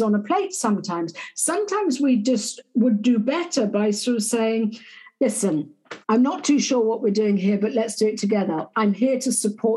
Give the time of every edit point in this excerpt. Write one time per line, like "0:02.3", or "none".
0:06.0
0:08.7